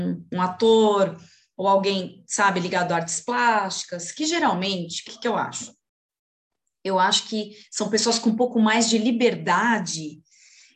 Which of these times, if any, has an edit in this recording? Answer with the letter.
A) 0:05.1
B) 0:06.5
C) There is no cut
A